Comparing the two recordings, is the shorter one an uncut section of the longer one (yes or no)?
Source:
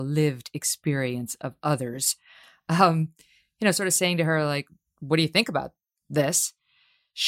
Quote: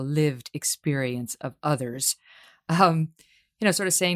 yes